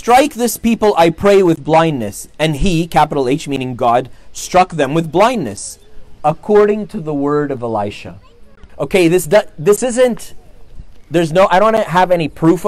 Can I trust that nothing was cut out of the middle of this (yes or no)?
no